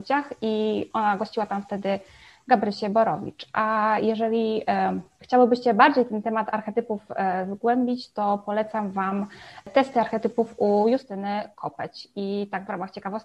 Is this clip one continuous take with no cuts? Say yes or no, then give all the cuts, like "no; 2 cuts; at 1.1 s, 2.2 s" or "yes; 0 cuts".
yes; 0 cuts